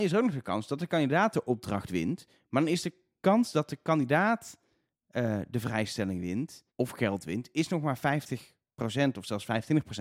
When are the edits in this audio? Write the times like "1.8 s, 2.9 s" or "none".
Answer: 6.7 s